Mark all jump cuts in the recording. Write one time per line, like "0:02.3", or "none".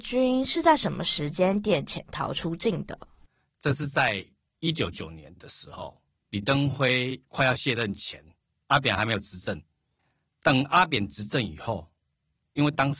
0:04.9